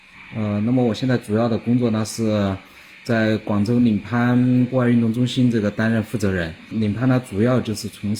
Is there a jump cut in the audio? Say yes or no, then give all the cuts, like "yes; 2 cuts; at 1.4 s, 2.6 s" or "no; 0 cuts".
no; 0 cuts